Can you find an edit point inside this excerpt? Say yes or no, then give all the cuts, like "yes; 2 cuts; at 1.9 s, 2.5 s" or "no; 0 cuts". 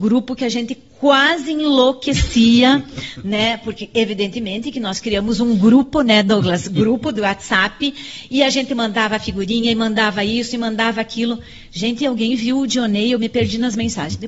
no; 0 cuts